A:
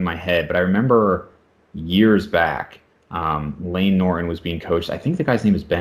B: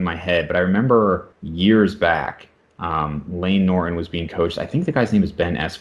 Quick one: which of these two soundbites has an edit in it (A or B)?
B